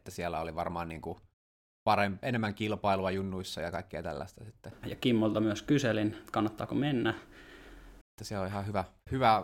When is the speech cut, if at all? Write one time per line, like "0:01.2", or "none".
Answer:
0:02.2
0:04.8
0:08.0